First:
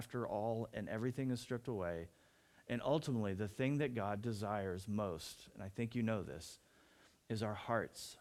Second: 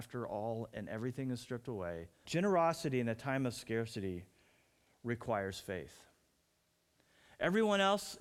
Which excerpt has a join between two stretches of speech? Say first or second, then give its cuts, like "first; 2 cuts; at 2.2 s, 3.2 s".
second; 1 cut; at 2.2 s